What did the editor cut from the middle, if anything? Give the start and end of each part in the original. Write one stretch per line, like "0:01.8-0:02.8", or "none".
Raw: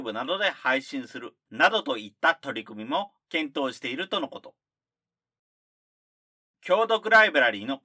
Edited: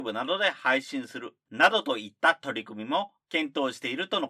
none

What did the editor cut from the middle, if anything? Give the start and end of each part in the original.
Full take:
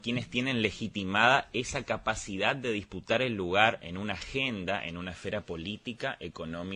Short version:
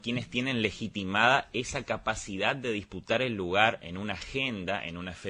none

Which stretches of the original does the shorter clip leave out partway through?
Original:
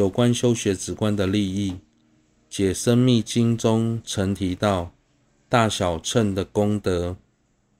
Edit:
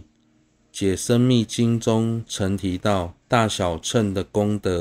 0:05.0-0:05.4

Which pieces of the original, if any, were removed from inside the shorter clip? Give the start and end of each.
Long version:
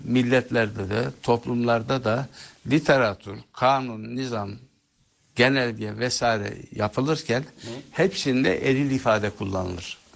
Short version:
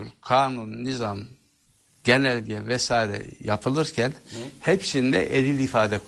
none

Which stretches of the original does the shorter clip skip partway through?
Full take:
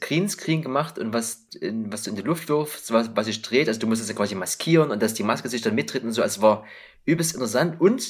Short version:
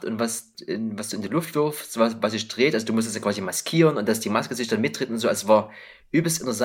none

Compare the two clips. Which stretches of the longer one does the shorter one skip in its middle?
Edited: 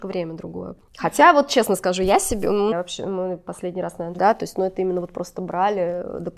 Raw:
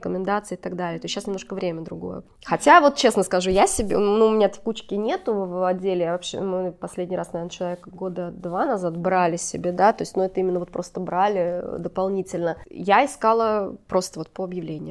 0:04.2-0:06.1
0:07.5-0:09.7

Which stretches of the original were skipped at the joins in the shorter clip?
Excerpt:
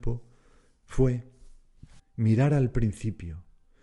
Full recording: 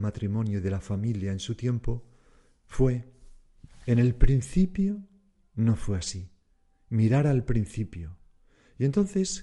0:03.8-0:06.7

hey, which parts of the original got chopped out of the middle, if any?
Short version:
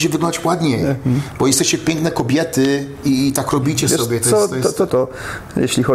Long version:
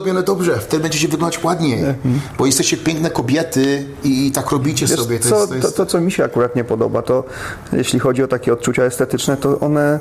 0:05.9-0:07.0

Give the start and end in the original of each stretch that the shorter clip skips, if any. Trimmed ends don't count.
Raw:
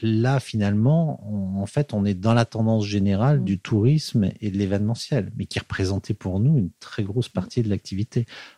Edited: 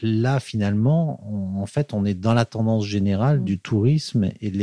none

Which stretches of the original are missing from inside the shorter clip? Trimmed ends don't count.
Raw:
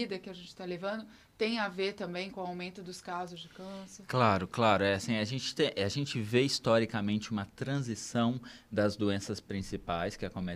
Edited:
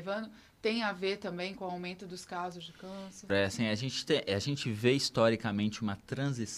0:04.1-0:04.8

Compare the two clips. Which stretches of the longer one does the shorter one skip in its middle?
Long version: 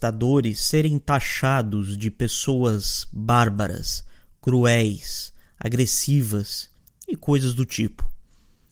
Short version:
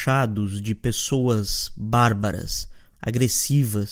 0:04.3-0:05.5

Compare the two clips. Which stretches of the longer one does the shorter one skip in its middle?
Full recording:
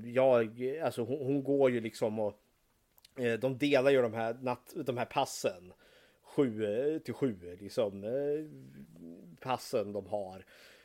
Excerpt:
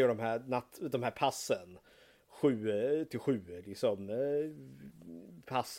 none

